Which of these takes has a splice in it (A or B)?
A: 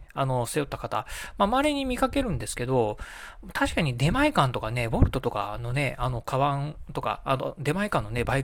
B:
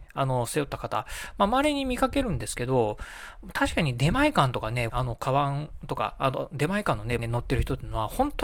B